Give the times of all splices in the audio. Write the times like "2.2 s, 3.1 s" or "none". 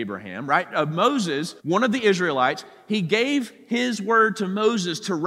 1.6 s

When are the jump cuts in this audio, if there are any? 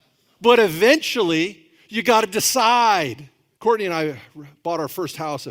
3.6 s

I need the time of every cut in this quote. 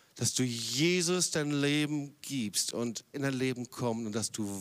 3.1 s

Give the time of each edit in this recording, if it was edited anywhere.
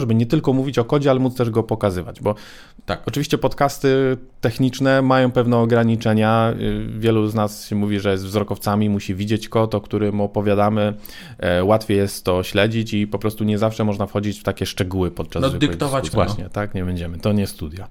16.1 s

